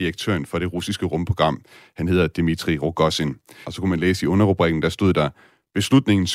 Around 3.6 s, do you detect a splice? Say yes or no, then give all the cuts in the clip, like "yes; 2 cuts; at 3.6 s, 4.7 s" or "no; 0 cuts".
yes; 1 cut; at 3.6 s